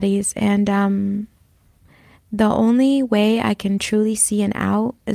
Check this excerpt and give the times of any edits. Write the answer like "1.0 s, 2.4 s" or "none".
none